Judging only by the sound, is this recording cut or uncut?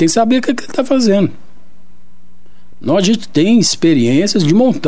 uncut